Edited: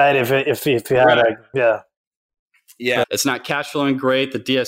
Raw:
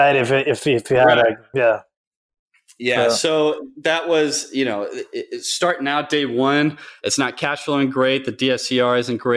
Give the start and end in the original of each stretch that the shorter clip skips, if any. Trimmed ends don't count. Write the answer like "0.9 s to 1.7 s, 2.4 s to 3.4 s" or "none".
3.0 s to 7.0 s